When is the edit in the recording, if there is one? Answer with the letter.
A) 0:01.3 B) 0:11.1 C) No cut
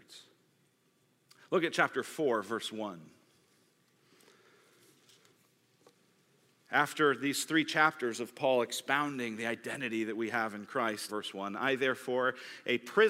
B